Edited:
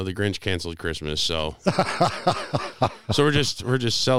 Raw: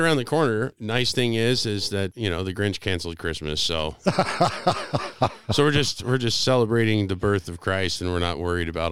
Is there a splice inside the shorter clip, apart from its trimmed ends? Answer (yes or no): no